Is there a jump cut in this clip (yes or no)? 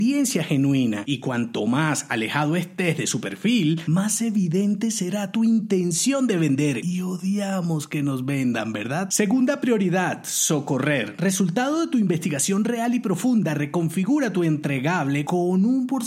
no